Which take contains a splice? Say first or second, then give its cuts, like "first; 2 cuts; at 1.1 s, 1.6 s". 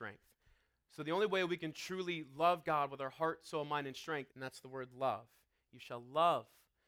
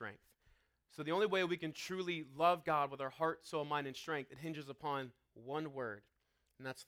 first; 1 cut; at 4.3 s